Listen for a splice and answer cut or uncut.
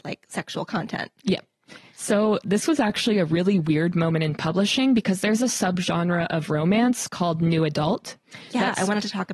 uncut